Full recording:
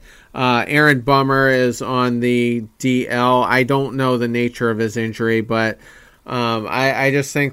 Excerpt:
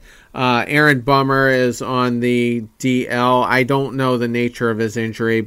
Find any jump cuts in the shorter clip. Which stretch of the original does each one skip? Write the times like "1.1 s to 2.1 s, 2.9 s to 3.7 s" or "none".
none

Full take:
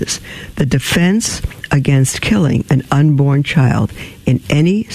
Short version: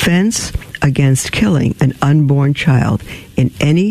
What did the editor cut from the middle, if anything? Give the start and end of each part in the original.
none

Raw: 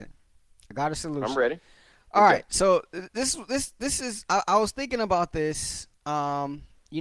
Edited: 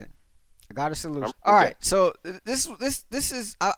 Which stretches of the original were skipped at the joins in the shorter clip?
1.3 s to 2.0 s

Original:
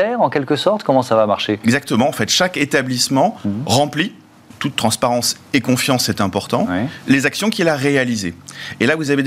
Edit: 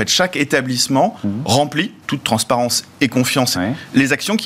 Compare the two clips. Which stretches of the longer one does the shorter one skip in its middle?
4.2 s to 4.5 s, 6.1 s to 6.7 s

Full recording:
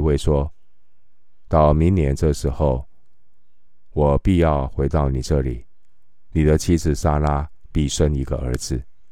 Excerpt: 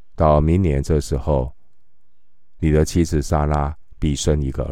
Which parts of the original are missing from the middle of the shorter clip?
3.9 s to 6.3 s

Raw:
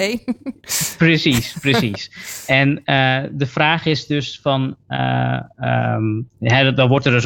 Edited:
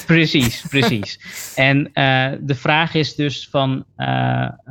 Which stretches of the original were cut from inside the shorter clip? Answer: none

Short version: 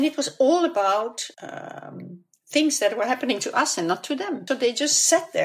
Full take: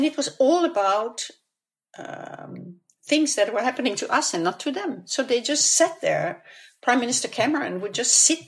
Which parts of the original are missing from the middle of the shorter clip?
1.3 s to 1.9 s, 5.0 s to 5.2 s

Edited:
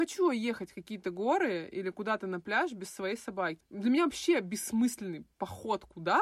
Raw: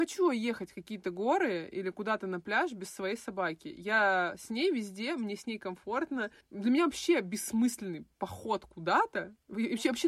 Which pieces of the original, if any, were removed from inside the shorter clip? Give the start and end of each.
3.6 s to 6.4 s

